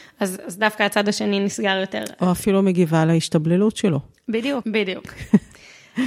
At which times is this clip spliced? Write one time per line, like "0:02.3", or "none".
0:04.6